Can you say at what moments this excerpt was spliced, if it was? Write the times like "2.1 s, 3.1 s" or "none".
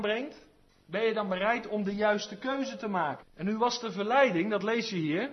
3.2 s